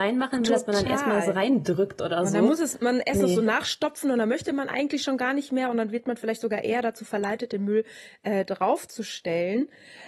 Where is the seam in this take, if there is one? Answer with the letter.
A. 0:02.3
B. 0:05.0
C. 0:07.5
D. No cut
D